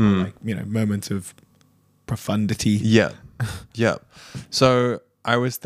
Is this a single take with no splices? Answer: yes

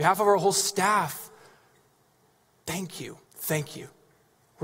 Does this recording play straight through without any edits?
no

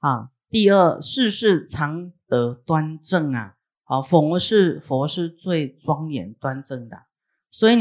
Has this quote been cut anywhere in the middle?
no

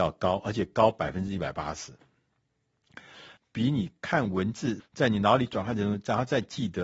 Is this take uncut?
no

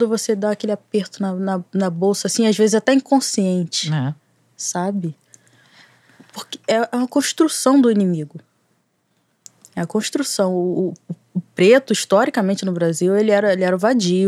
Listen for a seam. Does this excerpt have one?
no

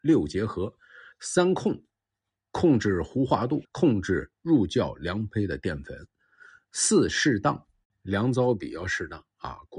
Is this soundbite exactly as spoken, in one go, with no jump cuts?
no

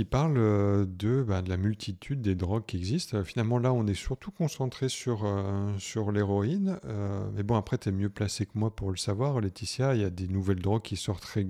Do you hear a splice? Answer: no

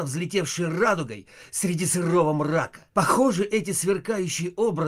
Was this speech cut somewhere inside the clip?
yes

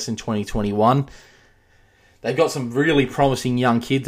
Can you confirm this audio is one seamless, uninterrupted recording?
yes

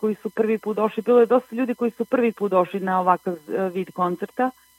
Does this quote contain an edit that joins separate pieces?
no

